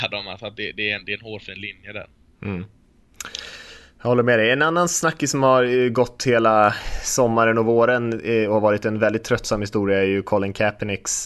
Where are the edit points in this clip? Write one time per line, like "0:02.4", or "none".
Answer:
none